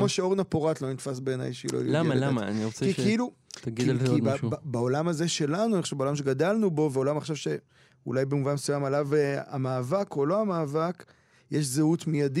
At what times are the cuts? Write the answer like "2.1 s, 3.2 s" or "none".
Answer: none